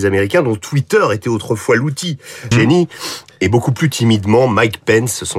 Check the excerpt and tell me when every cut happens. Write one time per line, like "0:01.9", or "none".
0:02.5

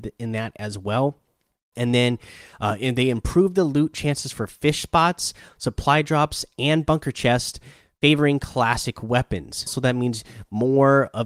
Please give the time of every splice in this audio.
0:01.7
0:09.7

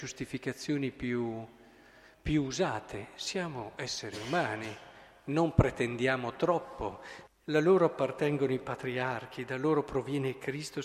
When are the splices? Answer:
0:07.3

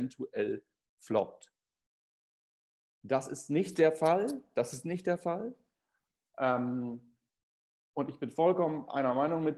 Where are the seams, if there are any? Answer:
none

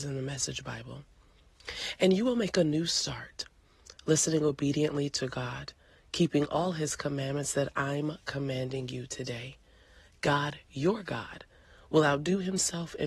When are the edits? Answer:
none

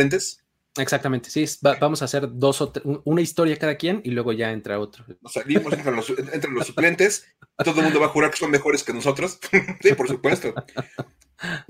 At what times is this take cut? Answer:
0:09.8

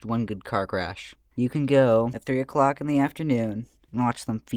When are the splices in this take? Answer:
0:01.3

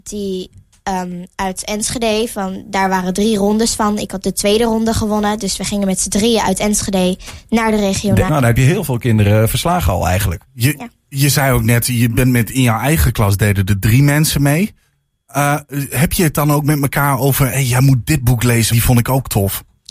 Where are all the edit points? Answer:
0:08.3
0:18.7

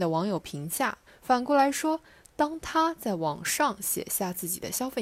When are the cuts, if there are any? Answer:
0:01.1

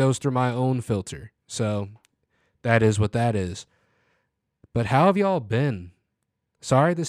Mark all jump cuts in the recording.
none

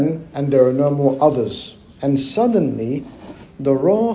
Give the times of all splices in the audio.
0:02.0

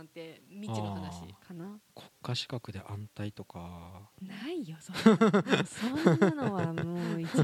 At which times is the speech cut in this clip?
0:01.4

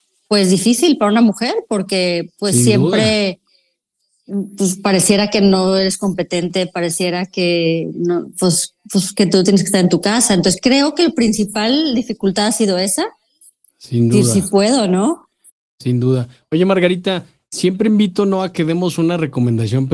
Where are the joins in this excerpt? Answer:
0:13.6

